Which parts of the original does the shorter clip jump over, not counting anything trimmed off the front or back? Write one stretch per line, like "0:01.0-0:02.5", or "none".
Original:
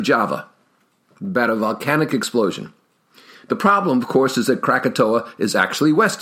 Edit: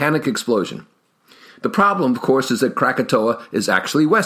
none